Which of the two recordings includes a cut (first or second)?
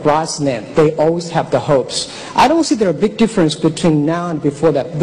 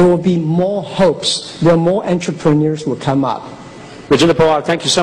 second